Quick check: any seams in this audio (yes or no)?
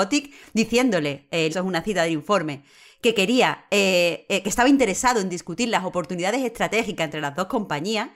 yes